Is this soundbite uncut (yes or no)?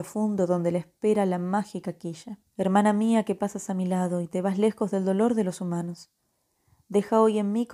no